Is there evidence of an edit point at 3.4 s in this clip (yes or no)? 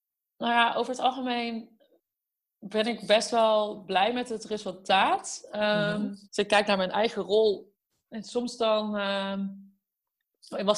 no